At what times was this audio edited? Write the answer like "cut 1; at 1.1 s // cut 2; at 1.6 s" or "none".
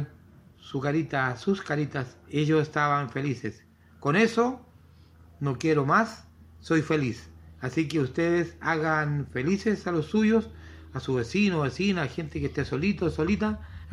cut 1; at 2.2 s